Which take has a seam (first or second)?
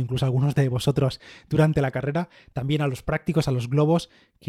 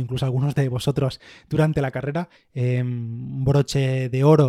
second